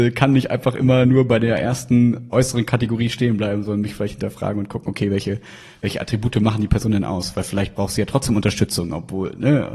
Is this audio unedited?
yes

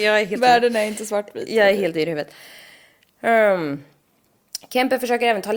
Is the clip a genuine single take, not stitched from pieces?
yes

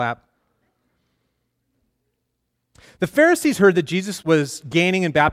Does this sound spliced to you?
yes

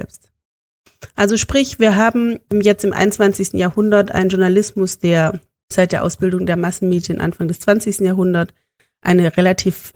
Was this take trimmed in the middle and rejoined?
no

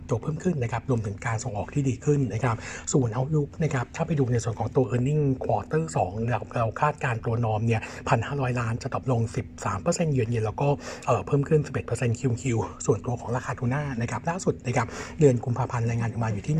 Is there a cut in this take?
no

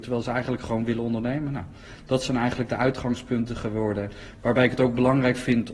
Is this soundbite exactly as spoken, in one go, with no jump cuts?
yes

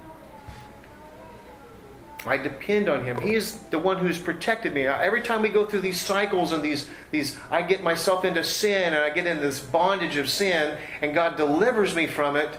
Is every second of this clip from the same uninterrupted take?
no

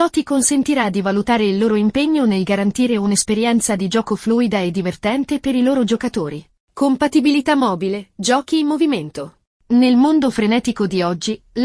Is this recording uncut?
yes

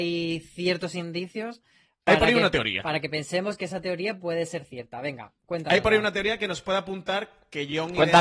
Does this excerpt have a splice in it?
no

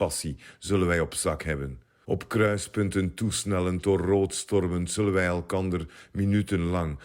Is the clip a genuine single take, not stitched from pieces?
no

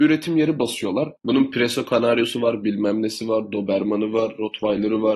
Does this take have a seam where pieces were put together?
yes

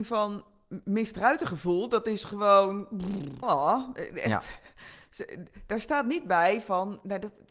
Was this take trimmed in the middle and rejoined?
yes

